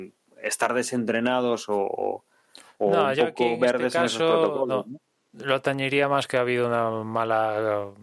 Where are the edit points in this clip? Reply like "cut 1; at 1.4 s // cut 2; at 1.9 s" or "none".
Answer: none

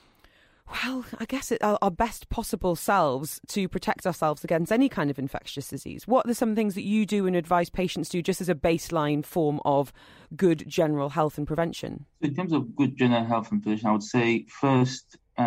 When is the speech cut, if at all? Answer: cut 1; at 12.1 s

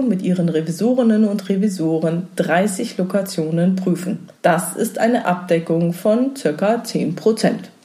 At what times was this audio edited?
cut 1; at 4.4 s

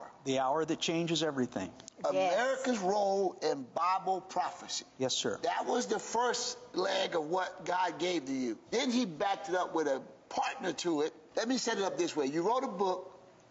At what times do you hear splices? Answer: cut 1; at 8.7 s // cut 2; at 11.3 s

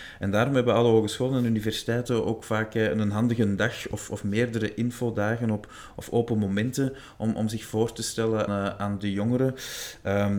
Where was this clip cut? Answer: cut 1; at 8.5 s

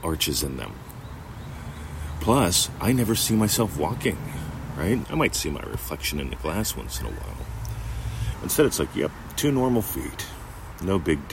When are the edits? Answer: cut 1; at 5.0 s // cut 2; at 8.3 s

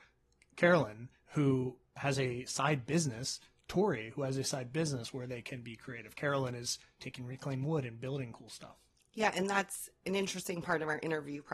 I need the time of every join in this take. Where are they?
none

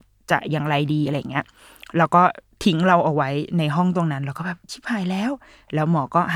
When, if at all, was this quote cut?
none

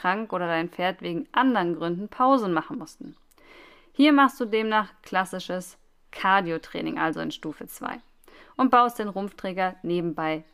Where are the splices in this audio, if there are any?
none

